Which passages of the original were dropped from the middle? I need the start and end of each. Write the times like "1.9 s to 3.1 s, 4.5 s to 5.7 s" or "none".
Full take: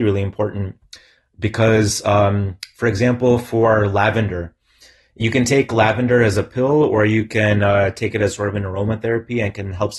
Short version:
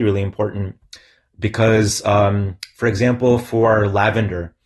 none